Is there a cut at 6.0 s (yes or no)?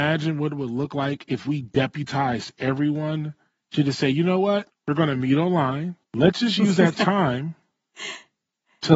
yes